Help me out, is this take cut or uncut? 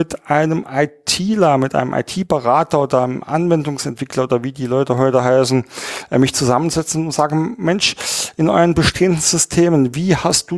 uncut